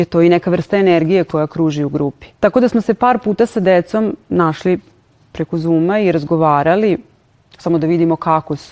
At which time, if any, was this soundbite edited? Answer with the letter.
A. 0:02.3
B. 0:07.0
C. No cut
A